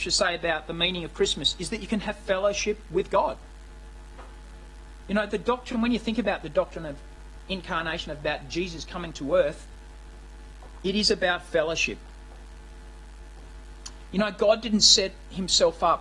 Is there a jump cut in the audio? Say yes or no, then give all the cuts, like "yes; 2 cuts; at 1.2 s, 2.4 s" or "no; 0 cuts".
no; 0 cuts